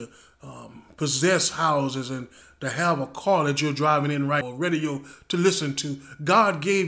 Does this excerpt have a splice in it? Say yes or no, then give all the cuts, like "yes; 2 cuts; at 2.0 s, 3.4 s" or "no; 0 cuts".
yes; 1 cut; at 4.4 s